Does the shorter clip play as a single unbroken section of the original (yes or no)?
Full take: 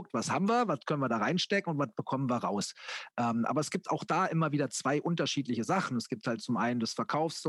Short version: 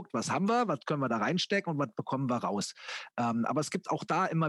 yes